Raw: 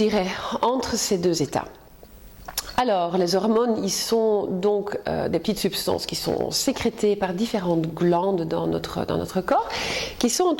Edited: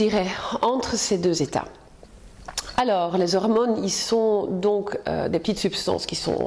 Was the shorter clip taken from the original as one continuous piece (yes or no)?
yes